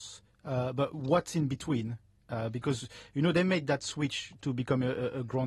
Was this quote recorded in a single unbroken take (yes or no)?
yes